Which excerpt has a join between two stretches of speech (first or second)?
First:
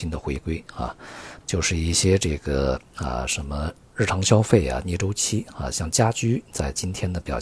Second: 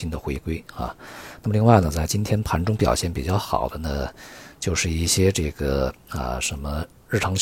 first